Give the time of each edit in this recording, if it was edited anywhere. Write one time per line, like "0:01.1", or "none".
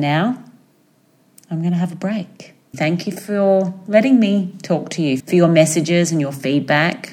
0:02.7
0:05.2